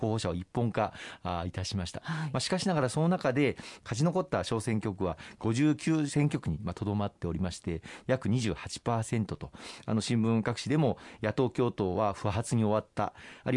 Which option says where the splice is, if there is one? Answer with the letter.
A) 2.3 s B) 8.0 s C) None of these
B